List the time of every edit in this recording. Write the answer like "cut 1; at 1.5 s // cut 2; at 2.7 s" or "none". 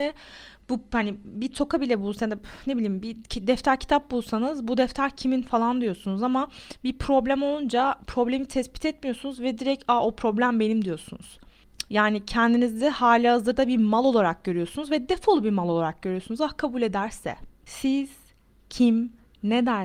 cut 1; at 11.9 s